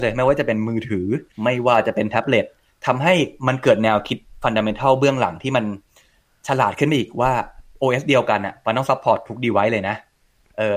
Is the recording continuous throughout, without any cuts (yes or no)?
no